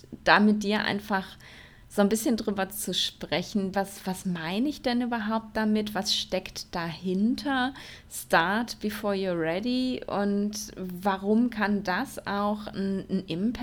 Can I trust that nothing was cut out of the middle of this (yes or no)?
no